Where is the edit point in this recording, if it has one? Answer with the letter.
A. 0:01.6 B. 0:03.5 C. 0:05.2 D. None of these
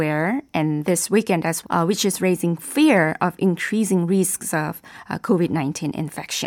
A